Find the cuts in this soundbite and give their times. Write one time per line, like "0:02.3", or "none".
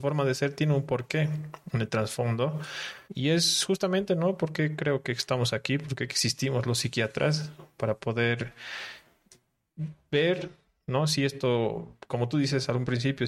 0:03.0